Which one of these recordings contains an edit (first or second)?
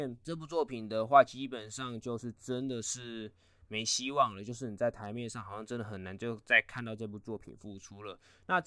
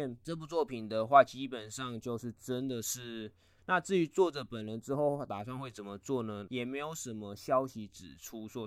second